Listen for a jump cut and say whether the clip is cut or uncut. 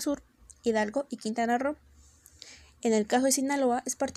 uncut